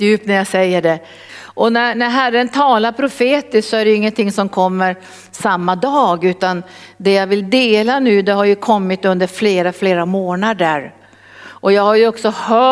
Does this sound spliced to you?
yes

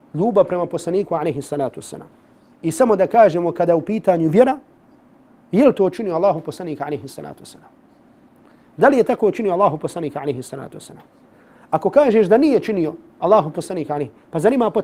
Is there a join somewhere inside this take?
yes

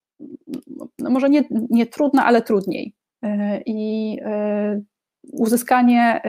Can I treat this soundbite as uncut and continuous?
yes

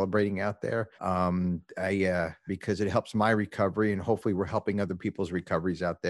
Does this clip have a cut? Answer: yes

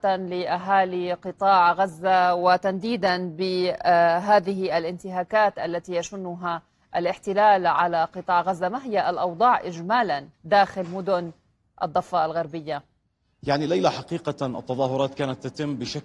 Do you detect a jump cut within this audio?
yes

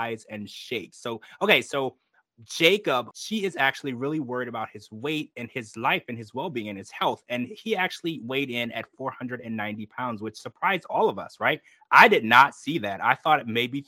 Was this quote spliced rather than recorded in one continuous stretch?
yes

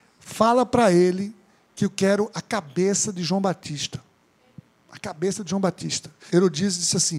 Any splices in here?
yes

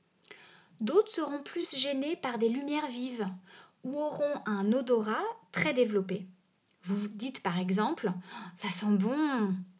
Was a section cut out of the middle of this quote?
no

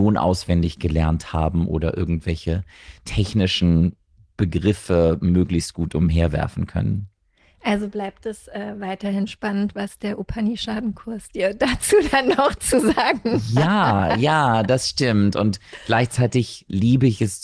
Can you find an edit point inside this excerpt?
no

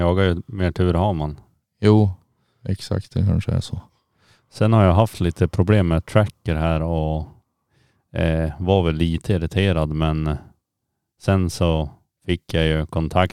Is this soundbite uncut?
yes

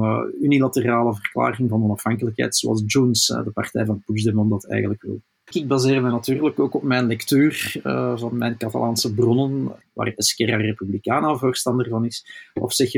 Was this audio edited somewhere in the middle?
yes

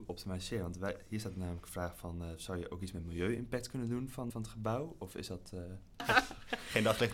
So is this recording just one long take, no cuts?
no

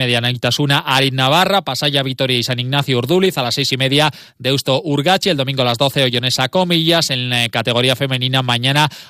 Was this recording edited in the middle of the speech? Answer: no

